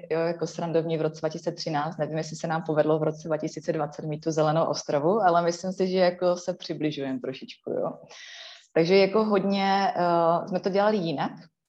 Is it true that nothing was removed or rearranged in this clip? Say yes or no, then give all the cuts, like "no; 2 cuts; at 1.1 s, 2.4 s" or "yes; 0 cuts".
yes; 0 cuts